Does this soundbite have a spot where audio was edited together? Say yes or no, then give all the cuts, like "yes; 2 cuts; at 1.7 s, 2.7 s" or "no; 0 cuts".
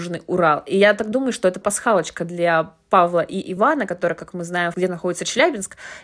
yes; 2 cuts; at 1.6 s, 4.7 s